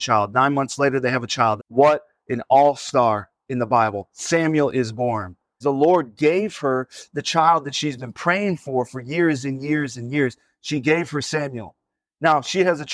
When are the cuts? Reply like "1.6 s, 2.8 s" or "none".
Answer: 1.6 s, 5.6 s